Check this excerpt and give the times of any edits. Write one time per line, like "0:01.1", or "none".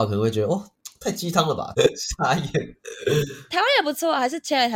0:01.7
0:03.5